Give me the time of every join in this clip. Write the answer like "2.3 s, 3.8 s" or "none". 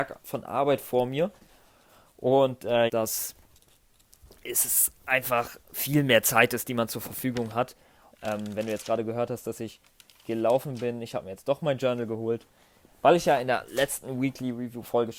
2.9 s, 8.1 s